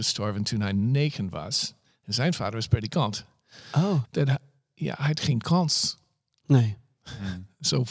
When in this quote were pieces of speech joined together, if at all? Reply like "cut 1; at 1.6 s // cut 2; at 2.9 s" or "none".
cut 1; at 4.0 s